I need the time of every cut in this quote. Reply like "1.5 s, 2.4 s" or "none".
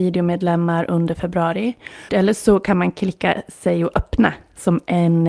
2.1 s